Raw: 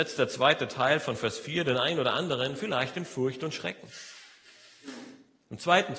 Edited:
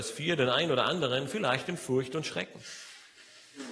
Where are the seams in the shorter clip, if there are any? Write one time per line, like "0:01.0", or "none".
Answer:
none